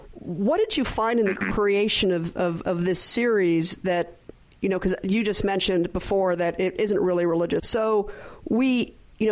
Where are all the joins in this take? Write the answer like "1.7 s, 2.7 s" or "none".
7.6 s